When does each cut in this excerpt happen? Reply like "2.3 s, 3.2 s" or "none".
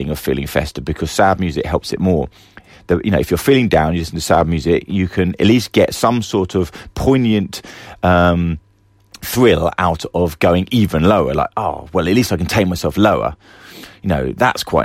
none